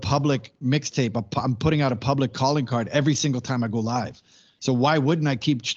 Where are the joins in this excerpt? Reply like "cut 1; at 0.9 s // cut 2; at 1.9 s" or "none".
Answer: none